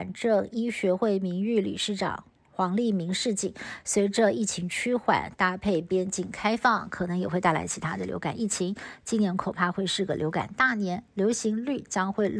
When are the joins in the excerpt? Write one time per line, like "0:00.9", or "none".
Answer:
none